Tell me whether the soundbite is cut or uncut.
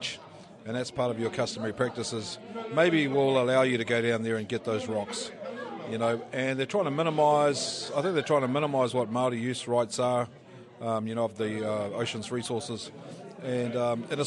uncut